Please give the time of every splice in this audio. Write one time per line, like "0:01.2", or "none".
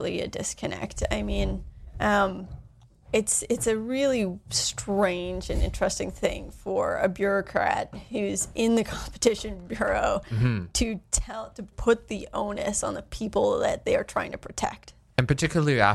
0:11.7